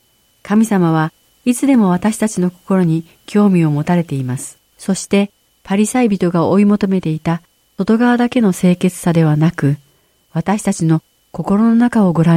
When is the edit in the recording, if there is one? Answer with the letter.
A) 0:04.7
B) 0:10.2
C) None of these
A